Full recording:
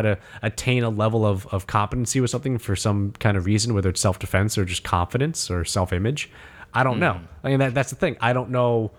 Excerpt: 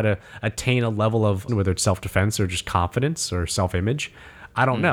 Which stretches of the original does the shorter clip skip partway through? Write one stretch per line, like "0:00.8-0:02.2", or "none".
0:01.5-0:03.7